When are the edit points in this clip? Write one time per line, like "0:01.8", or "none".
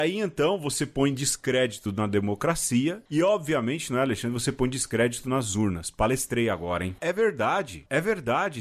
0:07.0